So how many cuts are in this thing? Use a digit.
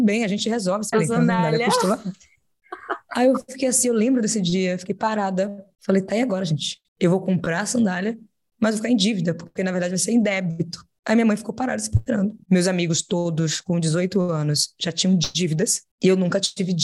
2